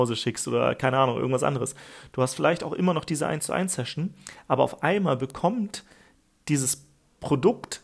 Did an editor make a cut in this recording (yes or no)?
yes